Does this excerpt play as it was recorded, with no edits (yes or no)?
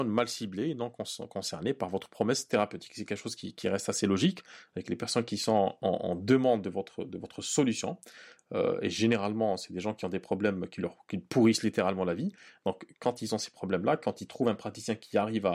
yes